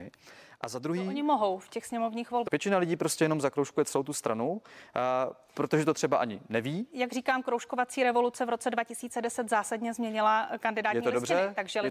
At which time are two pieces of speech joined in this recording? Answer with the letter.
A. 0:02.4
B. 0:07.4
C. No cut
A